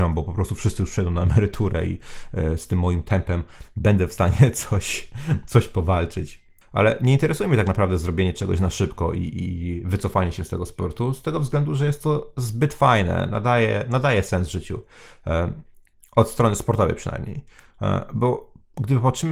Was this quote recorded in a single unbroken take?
no; 1 cut; at 6.6 s

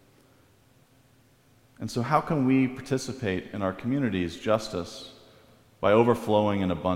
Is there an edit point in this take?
no; 0 cuts

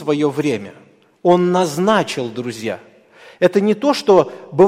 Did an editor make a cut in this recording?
no; 0 cuts

